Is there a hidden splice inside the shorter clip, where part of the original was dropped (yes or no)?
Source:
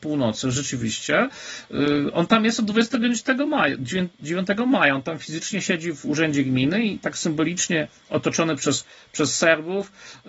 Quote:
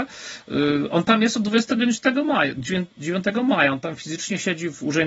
no